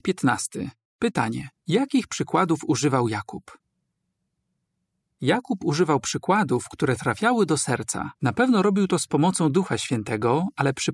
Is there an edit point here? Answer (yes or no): yes